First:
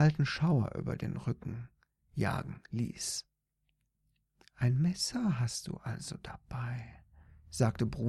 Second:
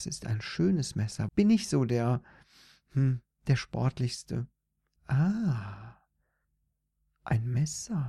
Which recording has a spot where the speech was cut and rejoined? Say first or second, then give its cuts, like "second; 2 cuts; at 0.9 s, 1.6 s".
second; 2 cuts; at 1.3 s, 5.0 s